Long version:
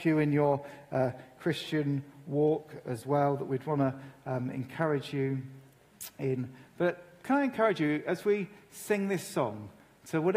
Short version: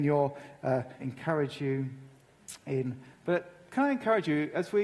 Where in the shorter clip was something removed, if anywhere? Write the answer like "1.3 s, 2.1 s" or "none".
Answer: 1.0 s